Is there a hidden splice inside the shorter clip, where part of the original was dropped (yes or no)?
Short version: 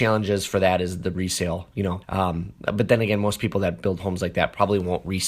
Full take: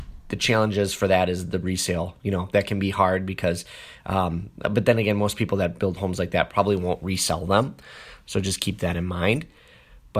yes